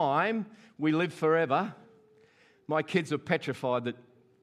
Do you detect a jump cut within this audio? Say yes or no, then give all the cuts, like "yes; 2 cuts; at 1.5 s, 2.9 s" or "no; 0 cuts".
no; 0 cuts